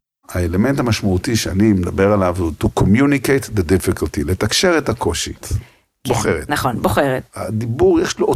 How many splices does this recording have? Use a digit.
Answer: 2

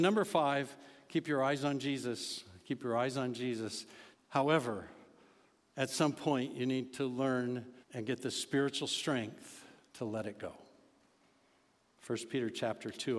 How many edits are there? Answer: 3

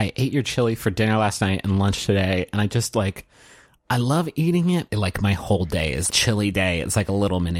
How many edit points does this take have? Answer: 2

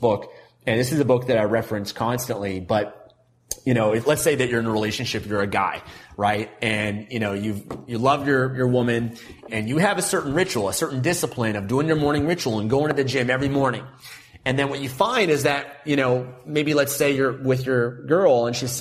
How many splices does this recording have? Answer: 1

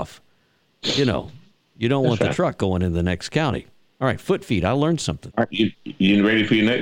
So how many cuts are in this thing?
1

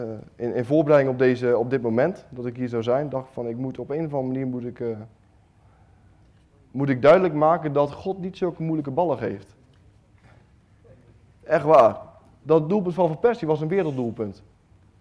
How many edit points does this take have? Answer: 0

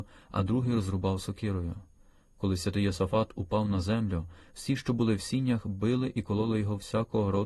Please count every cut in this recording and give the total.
0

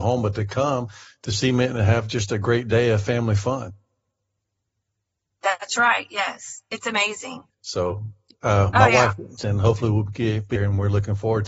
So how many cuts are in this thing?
3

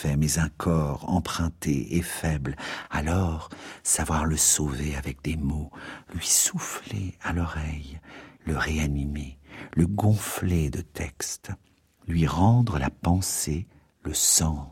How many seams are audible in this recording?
0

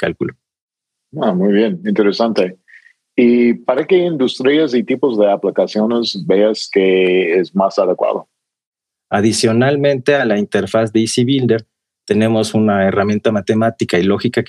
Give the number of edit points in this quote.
1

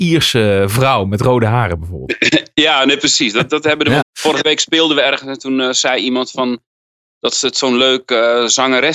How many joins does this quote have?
1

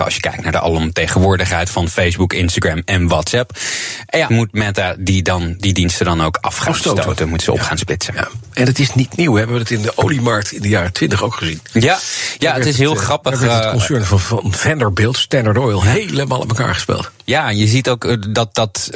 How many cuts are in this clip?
1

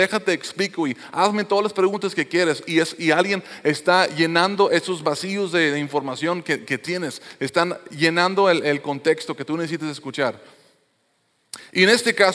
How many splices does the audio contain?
0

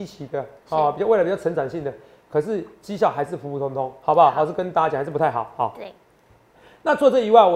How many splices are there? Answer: 0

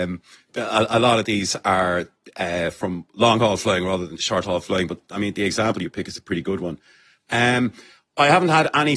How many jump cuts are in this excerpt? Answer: 0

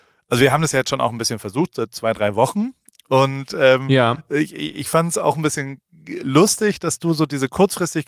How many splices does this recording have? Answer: 0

